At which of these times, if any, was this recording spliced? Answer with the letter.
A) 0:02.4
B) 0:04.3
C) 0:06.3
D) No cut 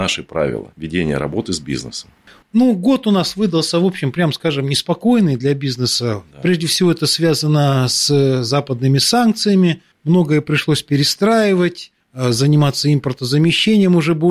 A